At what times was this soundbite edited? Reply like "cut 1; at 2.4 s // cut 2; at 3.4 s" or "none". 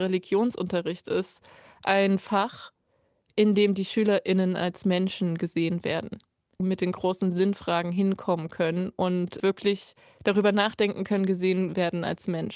cut 1; at 6.6 s // cut 2; at 9.4 s